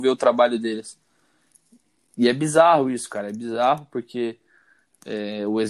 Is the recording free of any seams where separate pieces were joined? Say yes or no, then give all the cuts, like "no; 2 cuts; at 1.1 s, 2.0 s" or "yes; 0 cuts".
yes; 0 cuts